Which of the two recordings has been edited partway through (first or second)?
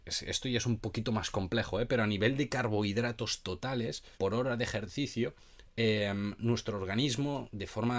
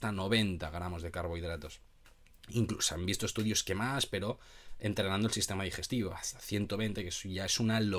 first